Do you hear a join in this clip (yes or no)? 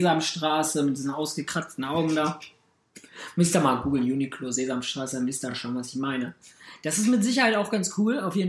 no